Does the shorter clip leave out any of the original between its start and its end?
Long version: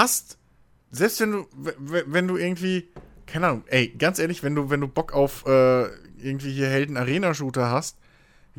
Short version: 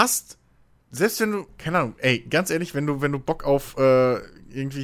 yes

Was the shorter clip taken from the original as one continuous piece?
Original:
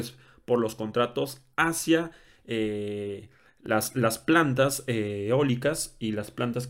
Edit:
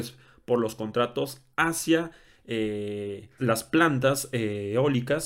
no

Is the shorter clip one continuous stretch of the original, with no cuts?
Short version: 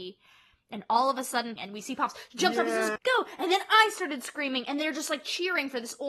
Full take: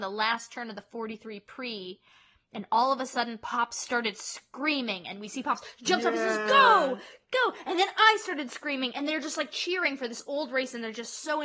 no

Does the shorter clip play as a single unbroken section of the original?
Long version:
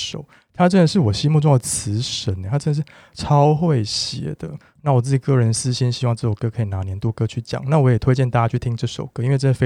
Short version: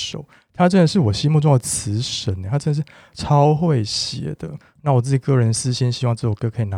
yes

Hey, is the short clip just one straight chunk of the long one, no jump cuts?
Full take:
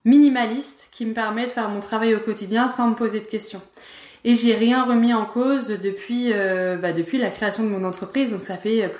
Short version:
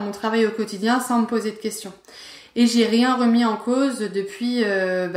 yes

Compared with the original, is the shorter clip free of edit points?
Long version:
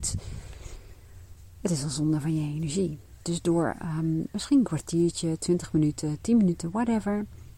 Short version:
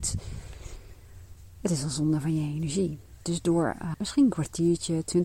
no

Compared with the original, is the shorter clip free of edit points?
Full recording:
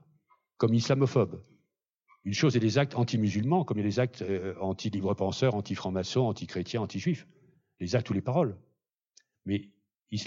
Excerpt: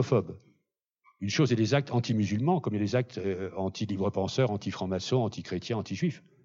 yes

